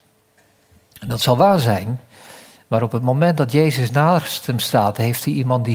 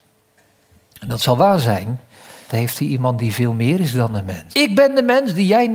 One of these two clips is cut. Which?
second; 2 cuts; at 2.5 s, 4.5 s

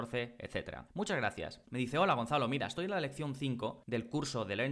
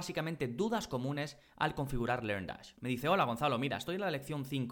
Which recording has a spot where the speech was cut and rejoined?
first; 1 cut; at 1.6 s

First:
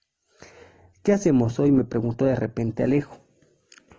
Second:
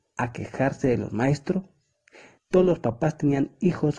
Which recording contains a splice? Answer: second; 1 cut; at 2.4 s

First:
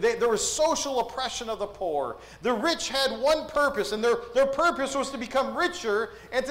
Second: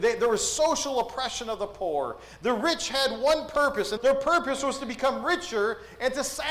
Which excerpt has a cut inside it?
second; 1 cut; at 4.0 s

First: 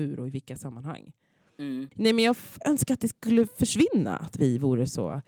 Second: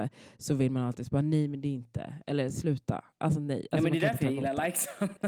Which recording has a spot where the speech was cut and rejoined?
first; 1 cut; at 2.6 s

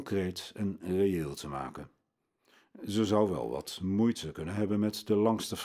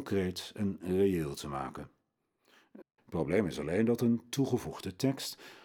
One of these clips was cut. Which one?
second; 1 cut; at 2.8 s

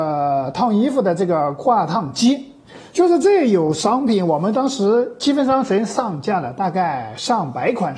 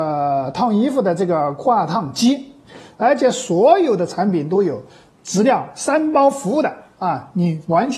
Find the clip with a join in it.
second; 1 cut; at 2.9 s

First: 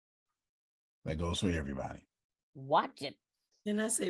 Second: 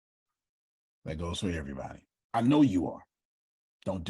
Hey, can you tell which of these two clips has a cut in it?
second; 1 cut; at 2.3 s

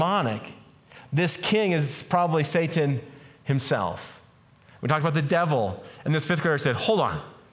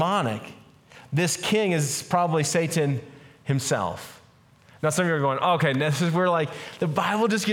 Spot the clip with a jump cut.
first; 1 cut; at 4.8 s

